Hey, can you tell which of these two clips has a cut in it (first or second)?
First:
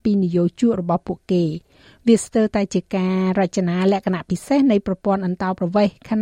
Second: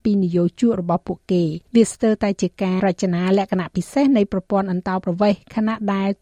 second